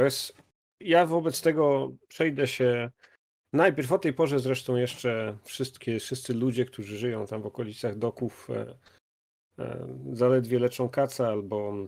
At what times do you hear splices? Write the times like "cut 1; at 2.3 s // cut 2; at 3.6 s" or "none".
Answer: none